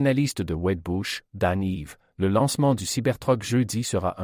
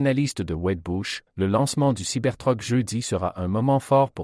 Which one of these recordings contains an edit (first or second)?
second